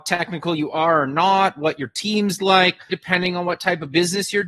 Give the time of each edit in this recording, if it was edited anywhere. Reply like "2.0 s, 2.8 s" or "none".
2.9 s